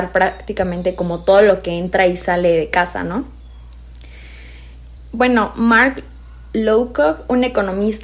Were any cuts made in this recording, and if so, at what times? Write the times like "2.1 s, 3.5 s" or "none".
5.0 s